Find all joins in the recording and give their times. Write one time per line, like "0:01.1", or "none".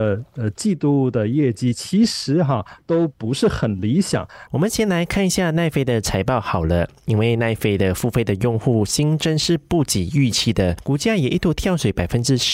0:04.5